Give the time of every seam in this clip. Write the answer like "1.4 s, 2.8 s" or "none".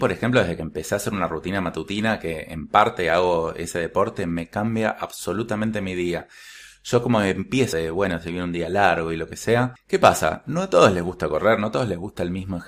7.7 s, 9.8 s